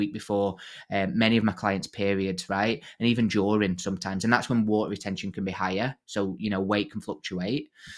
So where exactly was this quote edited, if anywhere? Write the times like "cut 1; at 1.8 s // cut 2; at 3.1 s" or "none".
none